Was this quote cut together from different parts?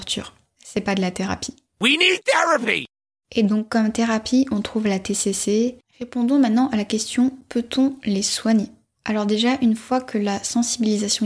yes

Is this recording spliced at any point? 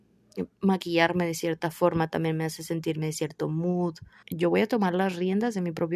yes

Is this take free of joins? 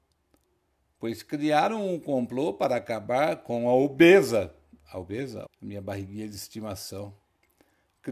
no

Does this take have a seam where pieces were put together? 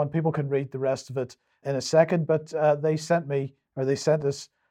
yes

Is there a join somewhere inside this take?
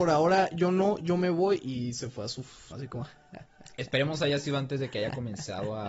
yes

